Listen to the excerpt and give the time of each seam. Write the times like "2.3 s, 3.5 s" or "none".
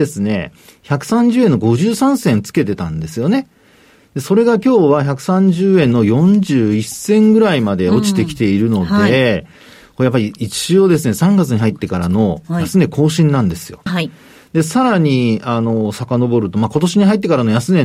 13.9 s